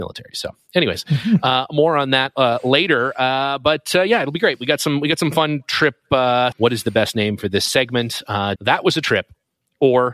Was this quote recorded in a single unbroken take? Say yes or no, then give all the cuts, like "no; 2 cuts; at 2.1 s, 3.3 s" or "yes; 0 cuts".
no; 2 cuts; at 6.5 s, 8.6 s